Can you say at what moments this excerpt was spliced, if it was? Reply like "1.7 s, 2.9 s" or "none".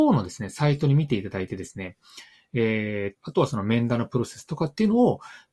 3.2 s